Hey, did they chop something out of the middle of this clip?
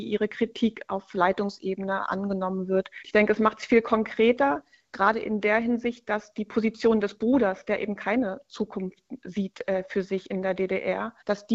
no; 0 cuts

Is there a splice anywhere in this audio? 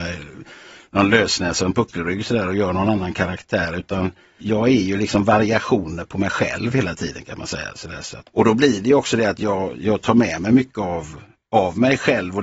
no; 0 cuts

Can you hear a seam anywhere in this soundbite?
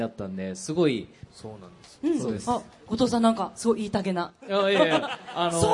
yes; 1 cut; at 1.3 s

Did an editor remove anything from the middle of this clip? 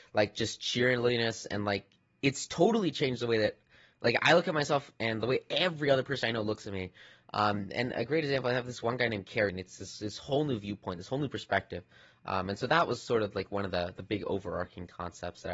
yes; 1 cut; at 9.5 s

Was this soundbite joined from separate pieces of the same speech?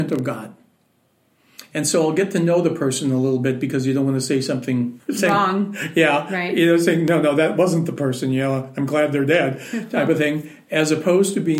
yes; 1 cut; at 5.0 s

